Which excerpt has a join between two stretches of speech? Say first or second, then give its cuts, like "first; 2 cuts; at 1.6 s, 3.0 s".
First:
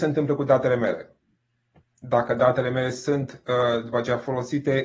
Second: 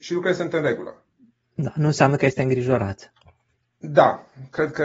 second; 1 cut; at 3.6 s